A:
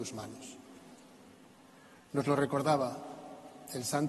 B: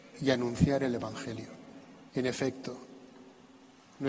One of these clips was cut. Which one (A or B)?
B